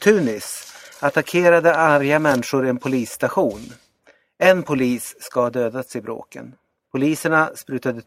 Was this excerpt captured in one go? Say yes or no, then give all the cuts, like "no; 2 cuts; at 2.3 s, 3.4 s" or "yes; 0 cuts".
no; 1 cut; at 6.8 s